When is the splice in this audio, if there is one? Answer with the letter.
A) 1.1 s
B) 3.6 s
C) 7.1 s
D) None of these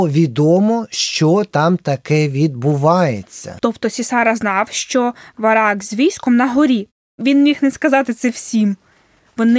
B